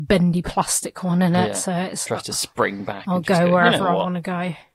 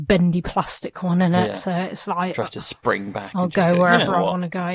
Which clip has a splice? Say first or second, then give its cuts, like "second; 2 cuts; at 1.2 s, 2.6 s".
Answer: first; 1 cut; at 2.1 s